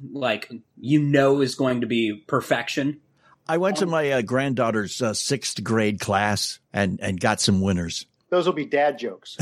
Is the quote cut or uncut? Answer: uncut